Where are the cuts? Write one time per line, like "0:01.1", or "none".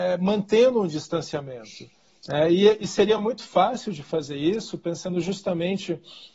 none